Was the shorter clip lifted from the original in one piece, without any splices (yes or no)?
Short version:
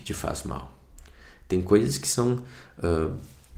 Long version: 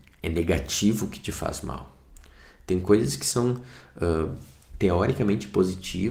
yes